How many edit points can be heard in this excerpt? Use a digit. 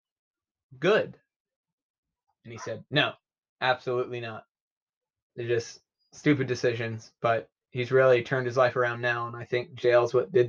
2